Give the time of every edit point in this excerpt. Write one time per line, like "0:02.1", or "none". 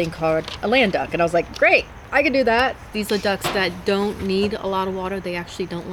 0:02.9